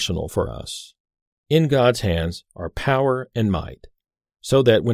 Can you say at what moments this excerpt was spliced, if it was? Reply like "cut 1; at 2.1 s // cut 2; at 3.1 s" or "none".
none